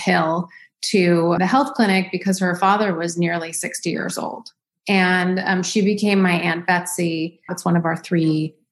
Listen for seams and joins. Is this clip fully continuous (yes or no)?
no